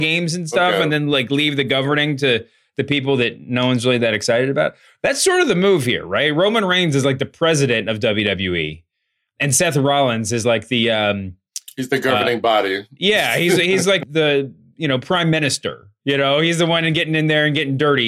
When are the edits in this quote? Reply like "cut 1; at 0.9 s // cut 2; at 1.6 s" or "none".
none